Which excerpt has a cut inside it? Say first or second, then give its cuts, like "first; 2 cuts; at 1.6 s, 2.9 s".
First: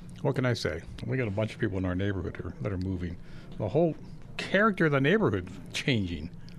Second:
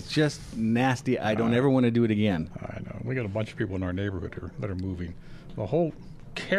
first; 1 cut; at 1.0 s